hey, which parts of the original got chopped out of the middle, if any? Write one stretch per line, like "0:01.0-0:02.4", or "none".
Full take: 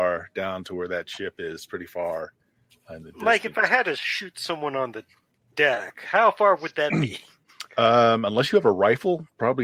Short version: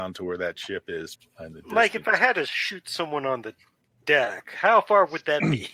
0:01.7-0:02.7